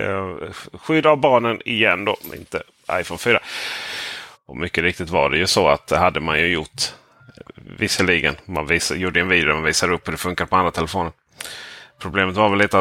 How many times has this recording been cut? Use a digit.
1